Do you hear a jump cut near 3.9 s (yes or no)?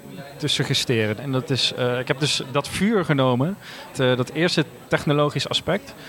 yes